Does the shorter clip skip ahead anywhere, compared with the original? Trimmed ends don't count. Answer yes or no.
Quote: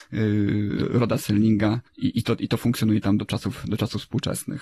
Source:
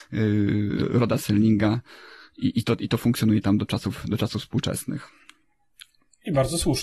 yes